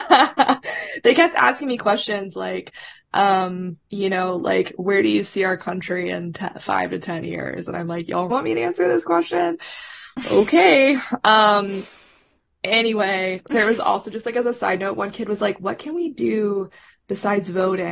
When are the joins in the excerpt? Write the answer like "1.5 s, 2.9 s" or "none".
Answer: 3.8 s, 8.3 s